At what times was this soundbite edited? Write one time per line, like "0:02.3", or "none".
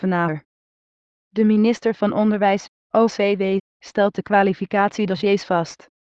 0:02.8